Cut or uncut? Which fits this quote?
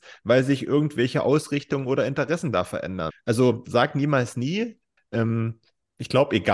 cut